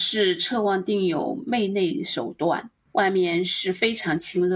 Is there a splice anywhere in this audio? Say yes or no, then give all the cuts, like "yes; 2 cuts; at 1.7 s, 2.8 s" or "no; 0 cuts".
yes; 1 cut; at 2.9 s